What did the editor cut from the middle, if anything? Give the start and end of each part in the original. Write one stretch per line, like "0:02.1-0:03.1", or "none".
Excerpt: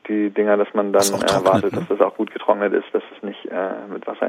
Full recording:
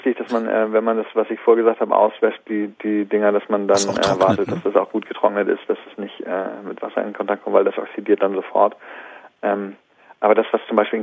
none